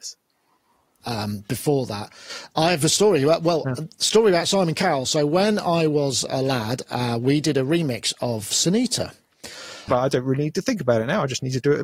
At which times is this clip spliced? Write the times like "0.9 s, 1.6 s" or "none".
1.0 s, 9.9 s